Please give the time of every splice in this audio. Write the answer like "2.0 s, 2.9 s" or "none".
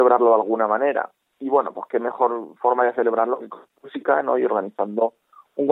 none